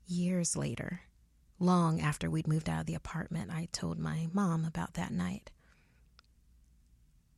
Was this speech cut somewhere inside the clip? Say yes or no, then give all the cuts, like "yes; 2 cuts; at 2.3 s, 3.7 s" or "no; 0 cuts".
no; 0 cuts